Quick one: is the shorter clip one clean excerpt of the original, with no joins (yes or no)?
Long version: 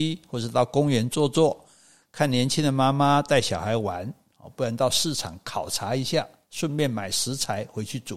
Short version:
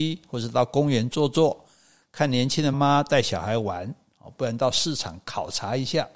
no